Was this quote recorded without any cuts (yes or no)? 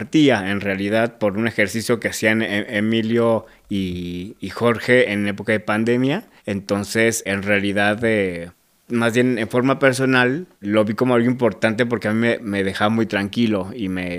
no